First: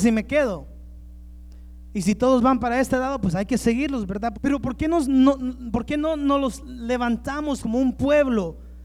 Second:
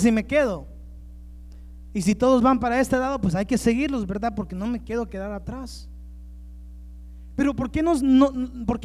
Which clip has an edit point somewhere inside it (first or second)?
first